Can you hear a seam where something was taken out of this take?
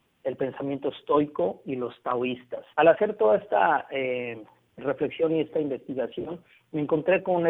yes; 1 cut; at 2.7 s

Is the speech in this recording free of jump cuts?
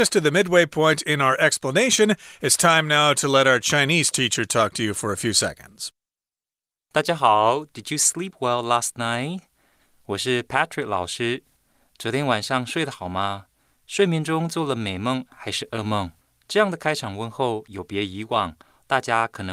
yes; 0 cuts

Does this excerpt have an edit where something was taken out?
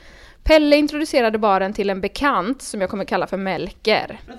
no; 0 cuts

